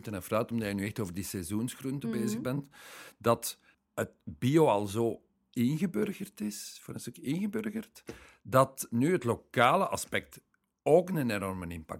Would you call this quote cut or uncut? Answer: uncut